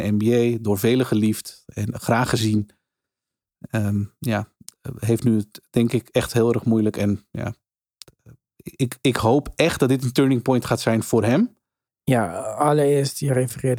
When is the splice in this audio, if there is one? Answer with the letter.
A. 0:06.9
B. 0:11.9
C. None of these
B